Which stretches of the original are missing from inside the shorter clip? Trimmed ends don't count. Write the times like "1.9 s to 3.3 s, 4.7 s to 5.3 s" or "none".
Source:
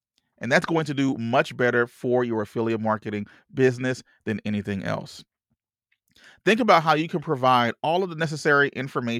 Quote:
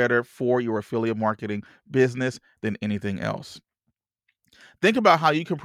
none